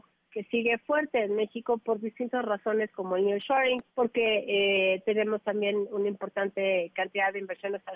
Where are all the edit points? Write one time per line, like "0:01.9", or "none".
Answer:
0:03.9